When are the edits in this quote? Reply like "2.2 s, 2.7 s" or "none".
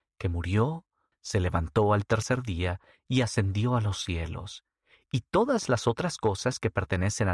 1.1 s